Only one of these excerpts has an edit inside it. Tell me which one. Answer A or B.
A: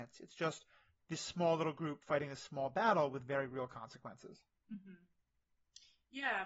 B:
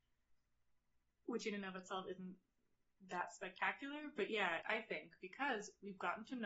B